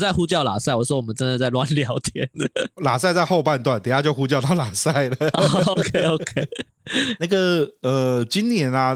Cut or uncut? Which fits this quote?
uncut